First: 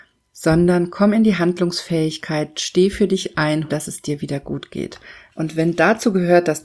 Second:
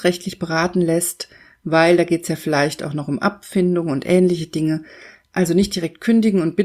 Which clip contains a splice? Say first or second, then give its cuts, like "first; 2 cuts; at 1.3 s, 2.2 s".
first; 2 cuts; at 3.7 s, 5.3 s